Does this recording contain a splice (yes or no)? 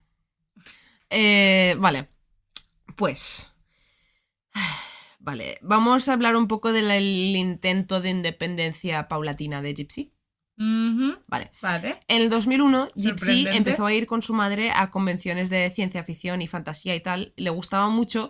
no